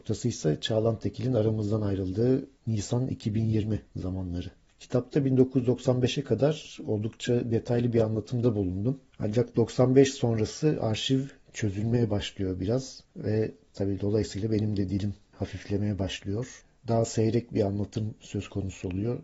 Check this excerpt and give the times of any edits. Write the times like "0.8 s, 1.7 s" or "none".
2.6 s